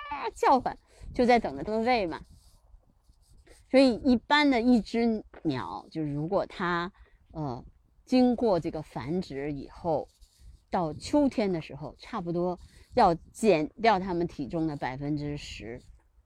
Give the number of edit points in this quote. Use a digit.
1